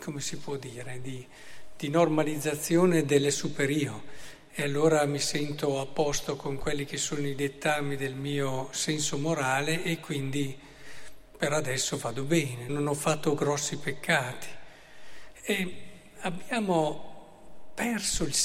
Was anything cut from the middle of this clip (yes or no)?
yes